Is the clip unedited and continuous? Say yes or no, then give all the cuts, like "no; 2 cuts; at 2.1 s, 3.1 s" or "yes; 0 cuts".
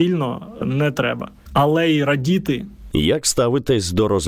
no; 1 cut; at 2.9 s